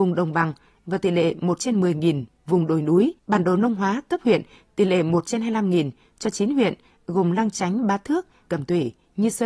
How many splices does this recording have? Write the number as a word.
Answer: two